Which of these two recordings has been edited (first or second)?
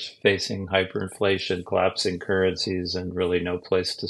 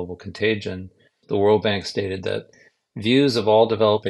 second